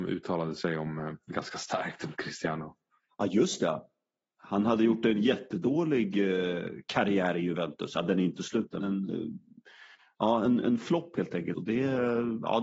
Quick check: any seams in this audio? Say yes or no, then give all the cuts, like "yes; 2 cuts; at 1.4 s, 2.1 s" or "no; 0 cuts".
yes; 2 cuts; at 8.8 s, 11.5 s